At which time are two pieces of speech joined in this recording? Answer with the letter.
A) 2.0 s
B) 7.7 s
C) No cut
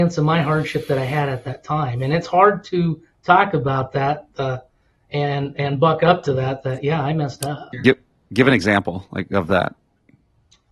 B